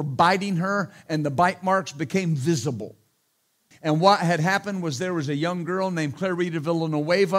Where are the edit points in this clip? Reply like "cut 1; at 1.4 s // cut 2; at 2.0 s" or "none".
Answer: cut 1; at 3.7 s